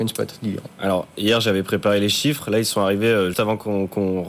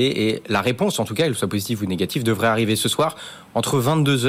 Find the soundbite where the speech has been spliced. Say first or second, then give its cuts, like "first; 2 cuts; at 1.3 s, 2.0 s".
first; 1 cut; at 3.3 s